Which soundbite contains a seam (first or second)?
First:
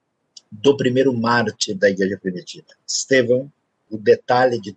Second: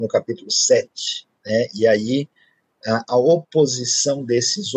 first